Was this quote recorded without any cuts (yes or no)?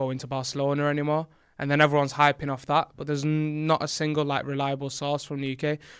yes